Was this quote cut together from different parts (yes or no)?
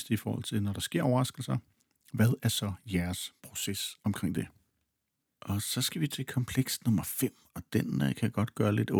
no